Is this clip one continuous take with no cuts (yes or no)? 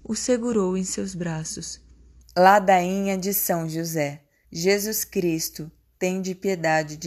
no